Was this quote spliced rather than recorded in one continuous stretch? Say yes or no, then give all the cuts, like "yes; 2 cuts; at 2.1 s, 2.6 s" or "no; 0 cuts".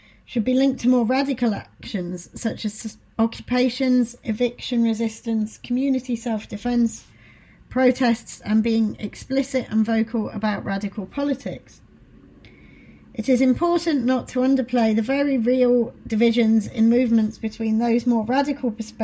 no; 0 cuts